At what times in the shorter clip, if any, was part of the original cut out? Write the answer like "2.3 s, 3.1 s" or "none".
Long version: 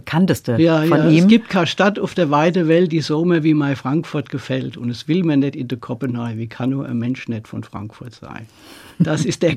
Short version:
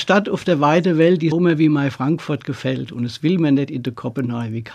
1.3 s